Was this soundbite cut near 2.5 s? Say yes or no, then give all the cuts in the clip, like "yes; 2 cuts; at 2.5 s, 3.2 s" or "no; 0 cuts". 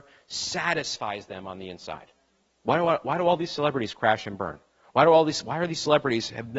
yes; 1 cut; at 2.5 s